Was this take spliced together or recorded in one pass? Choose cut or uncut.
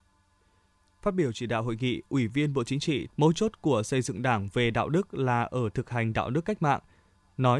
cut